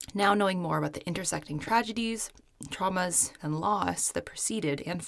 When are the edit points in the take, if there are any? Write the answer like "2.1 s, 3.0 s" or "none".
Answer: 3.4 s